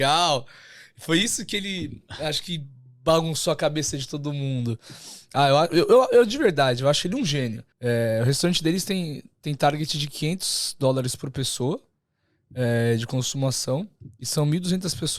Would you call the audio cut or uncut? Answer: cut